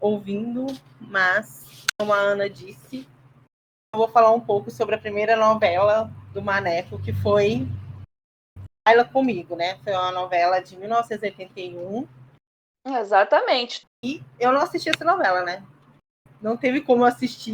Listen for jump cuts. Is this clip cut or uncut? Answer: cut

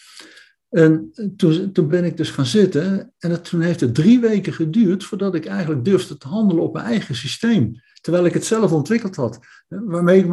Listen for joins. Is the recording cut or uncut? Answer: uncut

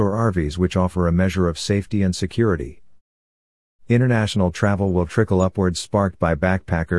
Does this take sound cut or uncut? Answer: uncut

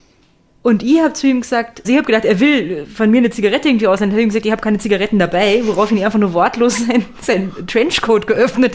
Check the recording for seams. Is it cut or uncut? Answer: cut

